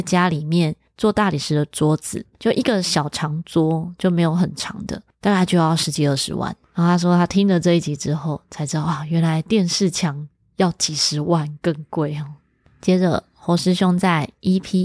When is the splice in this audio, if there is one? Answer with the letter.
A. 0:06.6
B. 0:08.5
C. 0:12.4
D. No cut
D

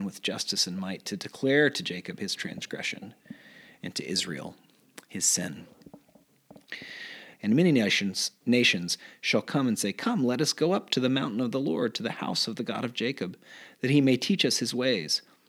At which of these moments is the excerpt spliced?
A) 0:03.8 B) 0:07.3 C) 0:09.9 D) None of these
B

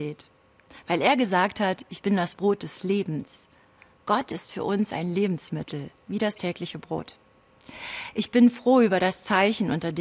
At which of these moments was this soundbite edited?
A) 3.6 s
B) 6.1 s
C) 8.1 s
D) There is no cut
B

